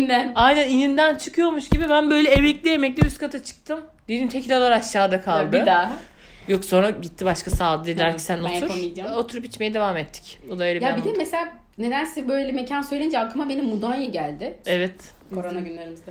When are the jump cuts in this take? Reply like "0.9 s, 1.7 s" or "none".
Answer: 10.4 s, 14.6 s

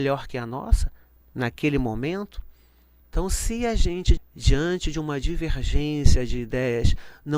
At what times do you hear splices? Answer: 3.0 s, 4.2 s

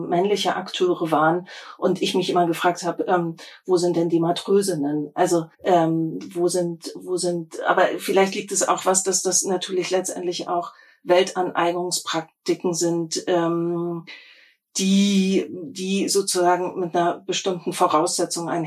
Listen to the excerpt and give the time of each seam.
5.5 s

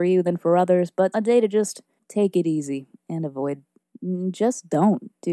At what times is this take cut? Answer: 1.1 s

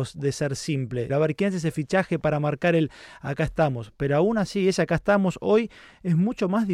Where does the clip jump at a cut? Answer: 1.1 s

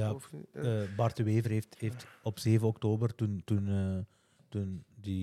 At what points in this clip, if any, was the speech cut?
none

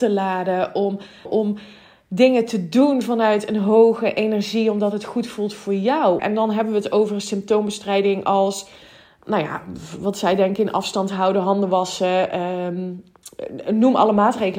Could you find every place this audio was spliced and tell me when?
1.3 s, 6.2 s

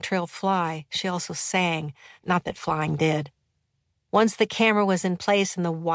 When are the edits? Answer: 2.2 s, 4.0 s

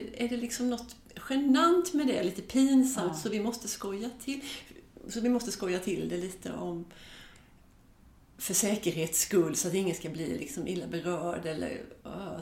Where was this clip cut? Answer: none

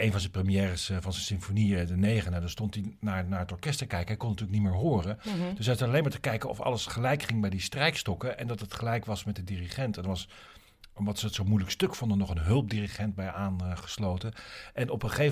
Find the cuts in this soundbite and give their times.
none

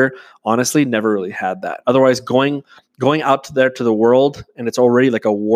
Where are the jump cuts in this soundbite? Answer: 1.8 s

